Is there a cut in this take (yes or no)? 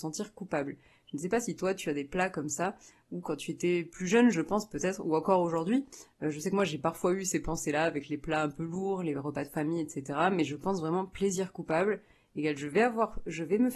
no